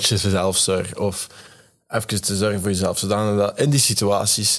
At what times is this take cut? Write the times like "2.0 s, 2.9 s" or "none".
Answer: none